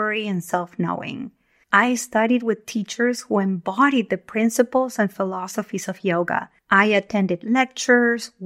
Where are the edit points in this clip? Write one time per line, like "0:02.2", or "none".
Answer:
0:01.6
0:06.6